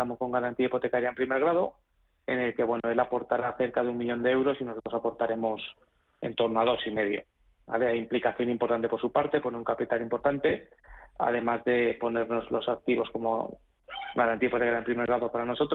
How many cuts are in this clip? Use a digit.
0